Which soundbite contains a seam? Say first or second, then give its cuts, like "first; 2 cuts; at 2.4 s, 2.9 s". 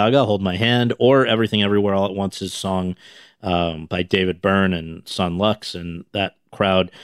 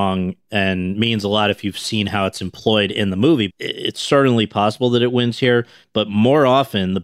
second; 1 cut; at 3.5 s